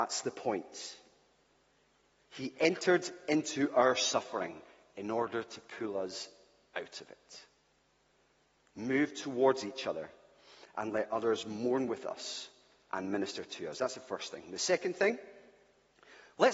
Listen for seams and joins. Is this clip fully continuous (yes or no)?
yes